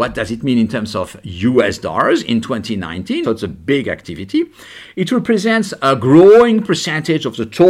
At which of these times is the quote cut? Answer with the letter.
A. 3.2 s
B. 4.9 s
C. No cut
A